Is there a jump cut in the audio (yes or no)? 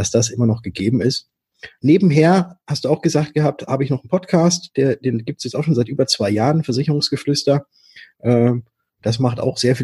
yes